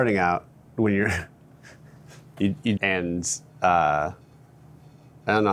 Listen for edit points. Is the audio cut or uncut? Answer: cut